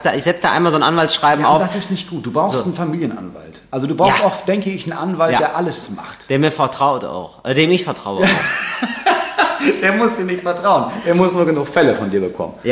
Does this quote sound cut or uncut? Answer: uncut